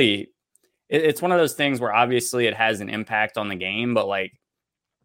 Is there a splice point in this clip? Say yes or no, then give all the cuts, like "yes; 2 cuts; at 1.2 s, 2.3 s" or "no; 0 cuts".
no; 0 cuts